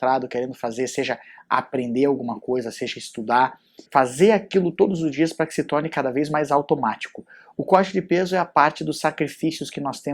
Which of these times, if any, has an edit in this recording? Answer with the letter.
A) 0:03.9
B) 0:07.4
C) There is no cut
A